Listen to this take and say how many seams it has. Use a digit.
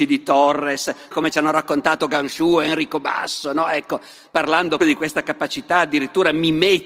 2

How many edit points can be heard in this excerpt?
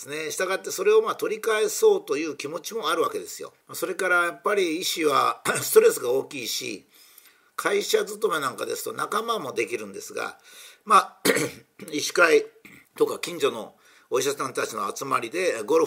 2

